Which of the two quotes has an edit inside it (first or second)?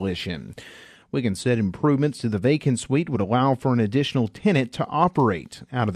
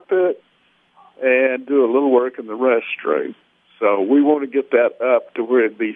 first